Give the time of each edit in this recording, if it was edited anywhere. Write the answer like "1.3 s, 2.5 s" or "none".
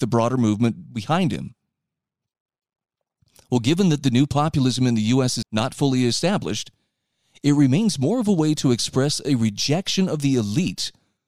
5.4 s